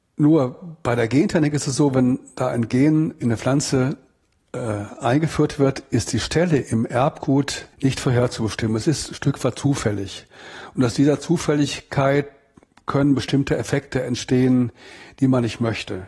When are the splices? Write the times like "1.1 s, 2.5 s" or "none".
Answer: 7.7 s